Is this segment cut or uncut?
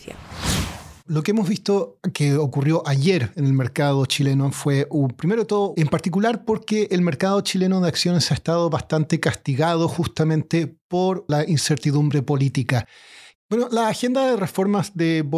cut